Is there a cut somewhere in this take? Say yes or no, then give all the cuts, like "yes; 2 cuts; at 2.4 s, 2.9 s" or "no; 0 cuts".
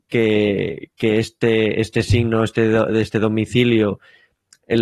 no; 0 cuts